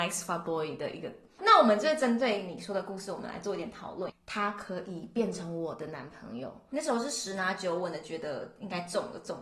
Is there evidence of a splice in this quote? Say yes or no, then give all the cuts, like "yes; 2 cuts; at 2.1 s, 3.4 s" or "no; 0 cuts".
yes; 2 cuts; at 1.3 s, 4.1 s